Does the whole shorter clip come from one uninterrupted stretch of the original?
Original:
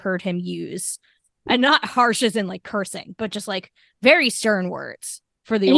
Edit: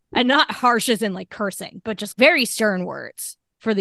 no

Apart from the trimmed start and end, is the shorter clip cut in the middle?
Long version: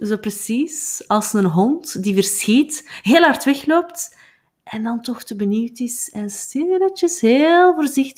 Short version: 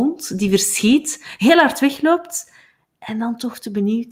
no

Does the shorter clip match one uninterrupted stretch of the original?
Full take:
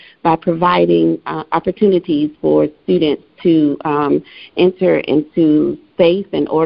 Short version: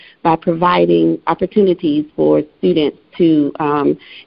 no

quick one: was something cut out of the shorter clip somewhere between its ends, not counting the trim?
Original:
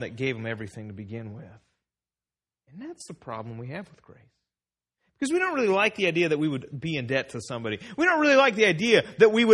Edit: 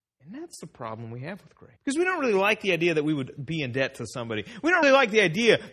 yes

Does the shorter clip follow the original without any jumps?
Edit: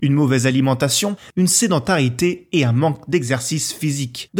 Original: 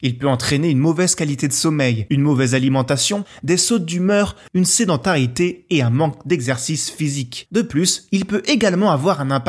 no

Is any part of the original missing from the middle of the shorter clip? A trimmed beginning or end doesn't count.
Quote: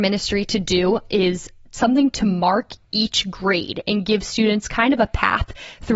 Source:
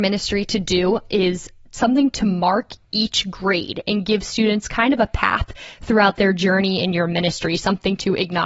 no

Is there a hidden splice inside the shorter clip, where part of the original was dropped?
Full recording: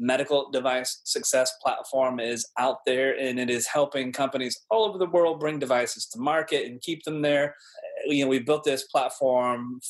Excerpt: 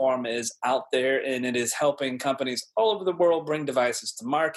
no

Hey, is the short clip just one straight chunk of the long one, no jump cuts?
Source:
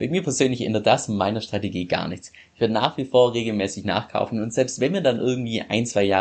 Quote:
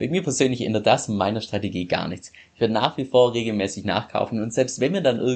yes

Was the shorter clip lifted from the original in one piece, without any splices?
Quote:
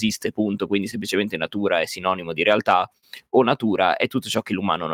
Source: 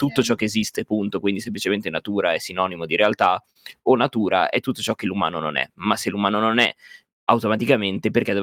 yes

